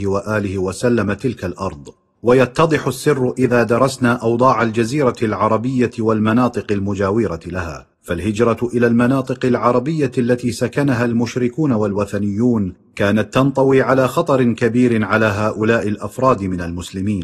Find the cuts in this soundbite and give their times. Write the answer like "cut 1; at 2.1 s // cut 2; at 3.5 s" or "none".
cut 1; at 7.9 s

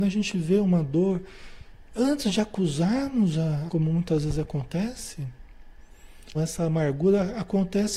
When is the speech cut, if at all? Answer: cut 1; at 3.7 s // cut 2; at 6.3 s

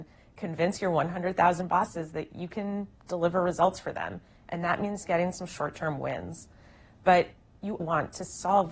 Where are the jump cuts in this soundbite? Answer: cut 1; at 7.8 s

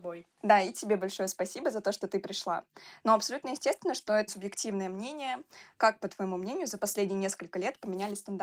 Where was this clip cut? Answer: cut 1; at 3.0 s // cut 2; at 4.3 s // cut 3; at 5.7 s

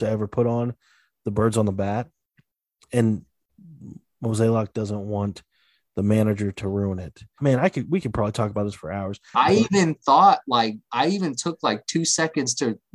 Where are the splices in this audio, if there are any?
cut 1; at 7.4 s // cut 2; at 9.3 s

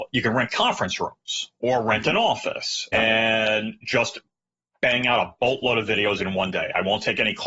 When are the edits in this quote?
cut 1; at 2.9 s

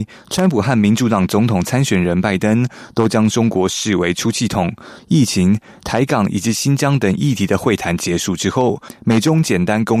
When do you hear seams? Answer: cut 1; at 5.0 s

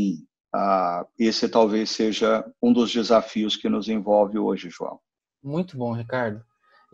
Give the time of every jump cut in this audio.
none

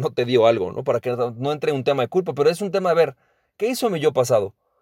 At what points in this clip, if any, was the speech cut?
none

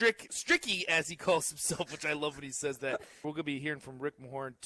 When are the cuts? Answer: cut 1; at 3.2 s

